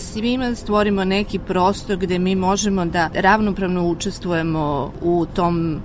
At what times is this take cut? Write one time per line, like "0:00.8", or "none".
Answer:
none

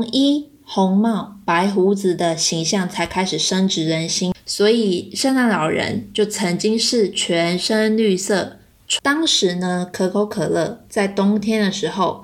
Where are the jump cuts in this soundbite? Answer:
0:04.3
0:09.0

